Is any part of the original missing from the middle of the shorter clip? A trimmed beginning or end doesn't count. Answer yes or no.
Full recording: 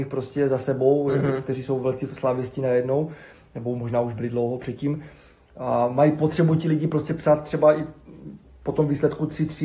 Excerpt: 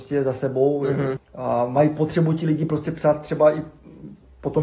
yes